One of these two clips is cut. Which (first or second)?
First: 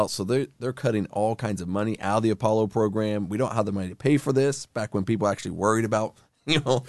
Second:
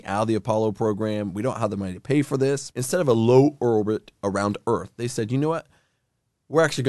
second